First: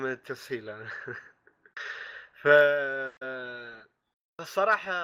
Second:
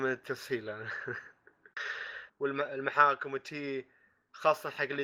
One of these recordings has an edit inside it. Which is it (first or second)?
second